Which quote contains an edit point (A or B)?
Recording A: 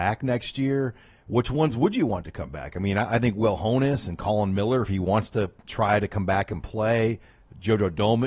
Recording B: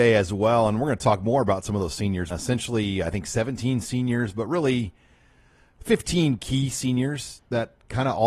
B